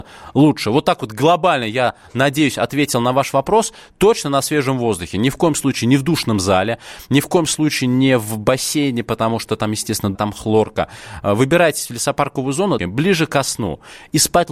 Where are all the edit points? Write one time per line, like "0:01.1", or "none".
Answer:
0:10.1
0:12.8